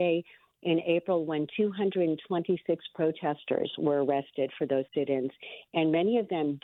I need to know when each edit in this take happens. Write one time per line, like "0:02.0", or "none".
none